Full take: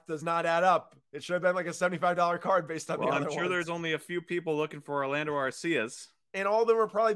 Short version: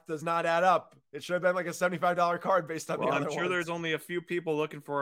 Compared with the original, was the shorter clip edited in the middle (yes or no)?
no